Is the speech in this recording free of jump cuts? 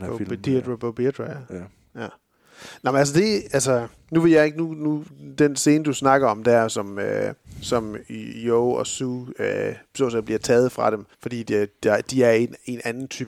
no; 1 cut; at 11.1 s

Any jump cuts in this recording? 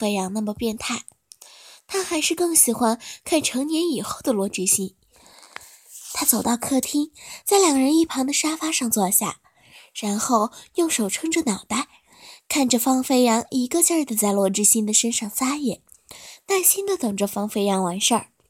no; 0 cuts

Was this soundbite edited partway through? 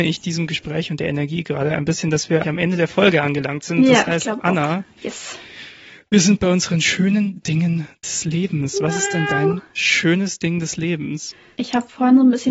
yes; 1 cut; at 2.4 s

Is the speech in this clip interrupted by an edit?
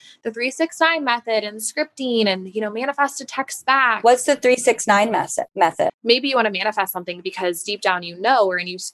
yes; 1 cut; at 5.9 s

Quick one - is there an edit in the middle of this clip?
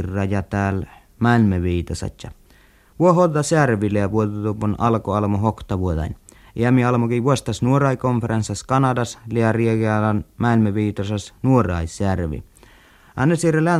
no; 0 cuts

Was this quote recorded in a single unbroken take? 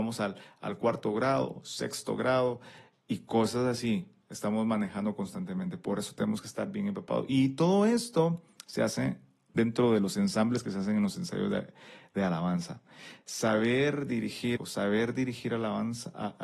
no; 1 cut; at 14.6 s

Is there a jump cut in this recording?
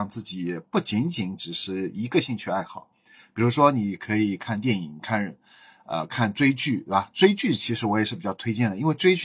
no; 0 cuts

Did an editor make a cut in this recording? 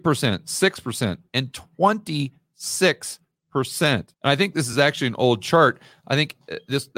no; 0 cuts

